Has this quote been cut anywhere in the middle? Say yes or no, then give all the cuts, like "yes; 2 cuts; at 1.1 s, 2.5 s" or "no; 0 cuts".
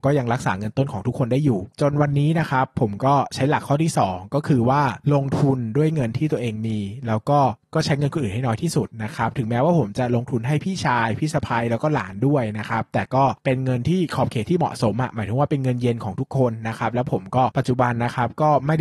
no; 0 cuts